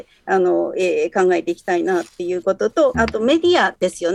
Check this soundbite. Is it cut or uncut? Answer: cut